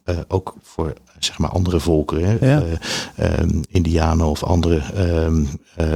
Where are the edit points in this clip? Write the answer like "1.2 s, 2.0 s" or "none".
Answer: none